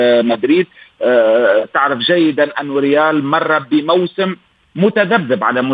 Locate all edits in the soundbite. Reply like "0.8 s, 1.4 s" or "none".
none